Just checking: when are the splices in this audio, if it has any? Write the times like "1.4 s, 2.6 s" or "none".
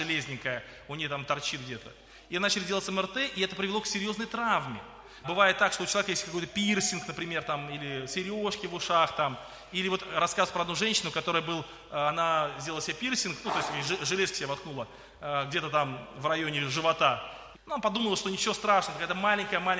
5.2 s, 17.5 s